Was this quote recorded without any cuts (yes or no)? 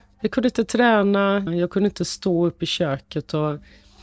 no